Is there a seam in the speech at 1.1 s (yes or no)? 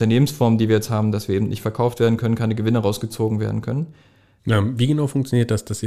no